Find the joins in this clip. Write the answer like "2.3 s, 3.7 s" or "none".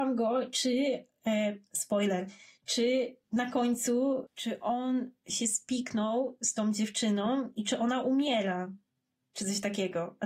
none